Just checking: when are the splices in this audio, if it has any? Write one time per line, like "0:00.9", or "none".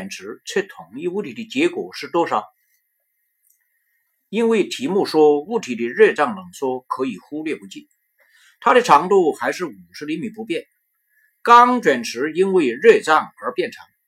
none